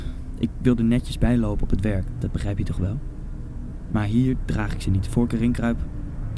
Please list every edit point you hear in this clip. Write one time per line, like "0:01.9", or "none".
0:02.1

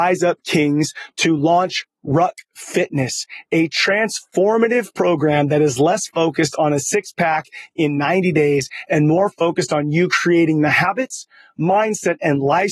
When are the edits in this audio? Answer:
none

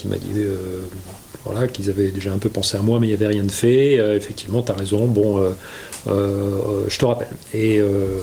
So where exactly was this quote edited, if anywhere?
none

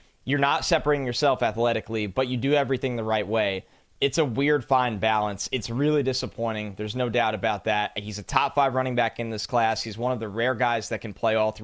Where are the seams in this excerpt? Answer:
none

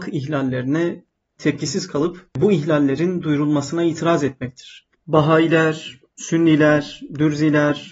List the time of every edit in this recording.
0:04.9

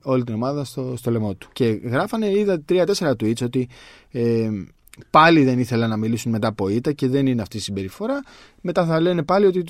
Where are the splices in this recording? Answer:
0:01.5

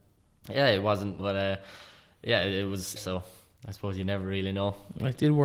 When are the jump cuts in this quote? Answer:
0:01.2
0:03.0

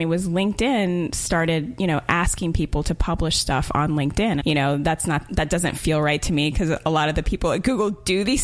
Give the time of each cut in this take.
0:04.4

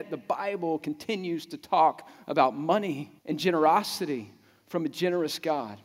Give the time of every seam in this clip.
0:03.2

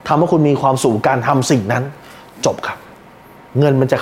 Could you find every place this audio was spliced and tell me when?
none

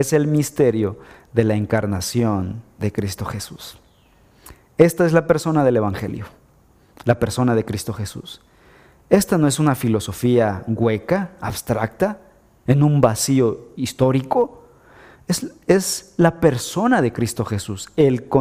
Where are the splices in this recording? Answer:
none

